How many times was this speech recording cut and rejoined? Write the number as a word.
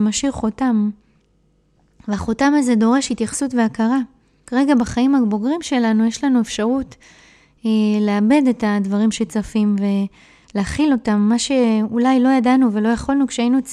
zero